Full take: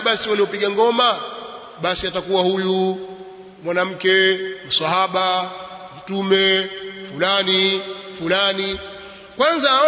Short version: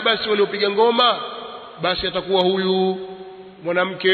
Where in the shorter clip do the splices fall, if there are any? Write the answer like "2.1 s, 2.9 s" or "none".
none